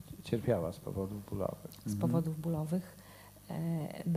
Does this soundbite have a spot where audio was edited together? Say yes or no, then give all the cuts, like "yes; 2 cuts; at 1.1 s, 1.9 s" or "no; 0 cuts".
no; 0 cuts